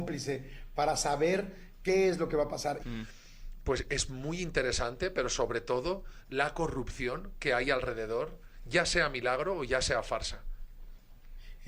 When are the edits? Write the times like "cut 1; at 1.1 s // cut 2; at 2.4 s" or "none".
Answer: cut 1; at 2.8 s